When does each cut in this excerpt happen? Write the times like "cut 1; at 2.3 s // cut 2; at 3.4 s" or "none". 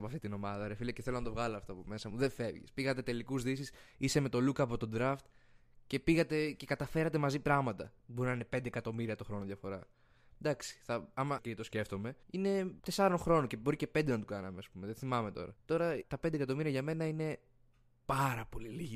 cut 1; at 8.0 s // cut 2; at 11.4 s